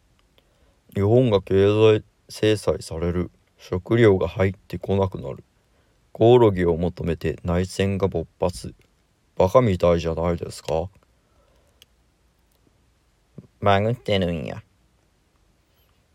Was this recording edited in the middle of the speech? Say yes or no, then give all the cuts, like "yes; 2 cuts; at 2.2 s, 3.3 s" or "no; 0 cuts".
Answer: no; 0 cuts